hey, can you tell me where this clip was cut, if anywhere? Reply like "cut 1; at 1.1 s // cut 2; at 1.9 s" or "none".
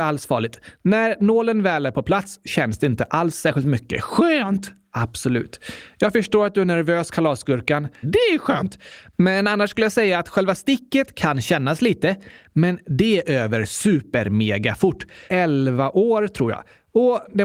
cut 1; at 8.0 s // cut 2; at 15.3 s